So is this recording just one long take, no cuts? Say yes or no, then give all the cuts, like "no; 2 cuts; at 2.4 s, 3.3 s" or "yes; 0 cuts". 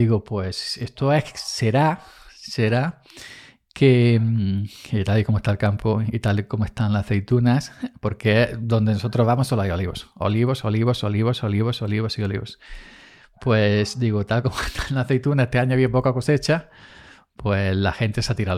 yes; 0 cuts